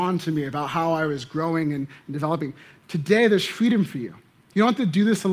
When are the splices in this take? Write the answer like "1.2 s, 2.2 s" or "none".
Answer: none